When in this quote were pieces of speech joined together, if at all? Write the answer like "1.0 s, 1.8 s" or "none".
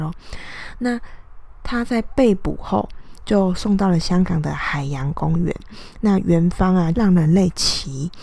6.9 s